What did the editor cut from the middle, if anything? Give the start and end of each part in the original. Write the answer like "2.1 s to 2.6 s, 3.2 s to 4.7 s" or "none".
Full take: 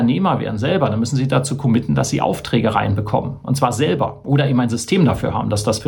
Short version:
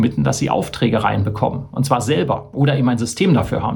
none